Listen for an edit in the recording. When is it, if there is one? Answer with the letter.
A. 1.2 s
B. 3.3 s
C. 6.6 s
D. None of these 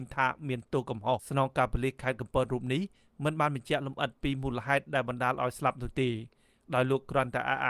A